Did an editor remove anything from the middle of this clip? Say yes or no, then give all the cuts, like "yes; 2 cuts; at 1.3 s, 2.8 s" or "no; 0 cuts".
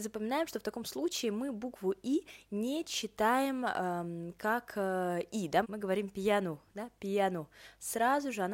yes; 1 cut; at 5.6 s